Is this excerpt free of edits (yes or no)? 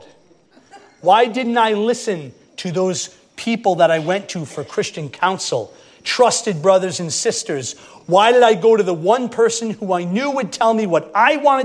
yes